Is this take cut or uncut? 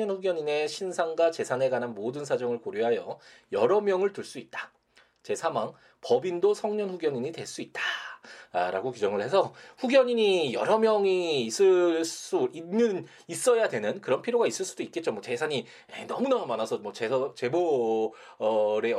uncut